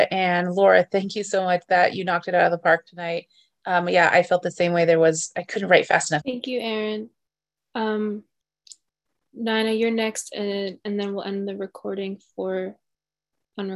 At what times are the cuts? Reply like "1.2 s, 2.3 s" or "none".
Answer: 6.2 s